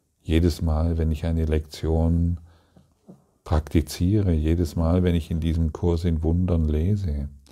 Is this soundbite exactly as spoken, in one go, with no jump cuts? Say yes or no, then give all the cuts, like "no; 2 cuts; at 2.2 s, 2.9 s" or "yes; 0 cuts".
yes; 0 cuts